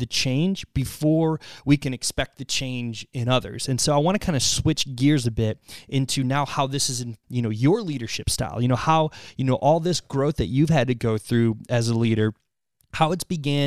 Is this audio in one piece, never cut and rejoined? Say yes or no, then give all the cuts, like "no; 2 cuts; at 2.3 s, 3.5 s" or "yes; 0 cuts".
no; 1 cut; at 7.2 s